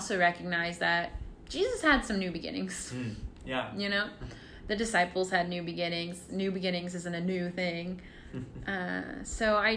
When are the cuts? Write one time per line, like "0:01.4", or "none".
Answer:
0:06.3